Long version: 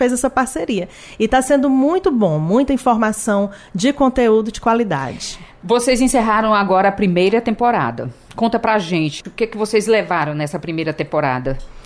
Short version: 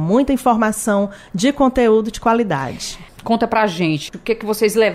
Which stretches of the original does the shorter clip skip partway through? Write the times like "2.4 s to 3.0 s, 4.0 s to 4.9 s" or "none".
5.5 s to 8.2 s